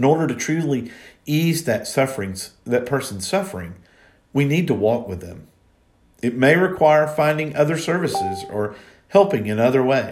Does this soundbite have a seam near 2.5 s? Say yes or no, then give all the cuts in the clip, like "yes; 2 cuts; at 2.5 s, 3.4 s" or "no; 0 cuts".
no; 0 cuts